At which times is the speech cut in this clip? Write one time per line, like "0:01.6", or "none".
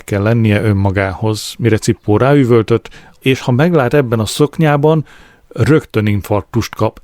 0:03.2